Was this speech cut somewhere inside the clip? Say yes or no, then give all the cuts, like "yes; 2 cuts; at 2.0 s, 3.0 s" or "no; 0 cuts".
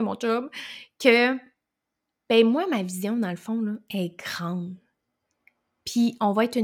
no; 0 cuts